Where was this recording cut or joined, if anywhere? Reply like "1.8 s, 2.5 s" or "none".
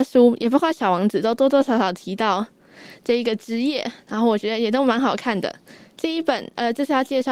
none